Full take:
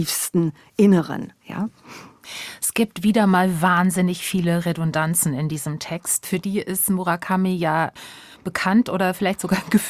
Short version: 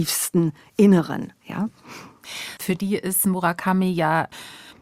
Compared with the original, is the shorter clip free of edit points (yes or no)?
no